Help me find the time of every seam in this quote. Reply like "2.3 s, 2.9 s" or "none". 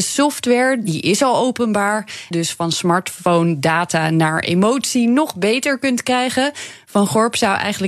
2.3 s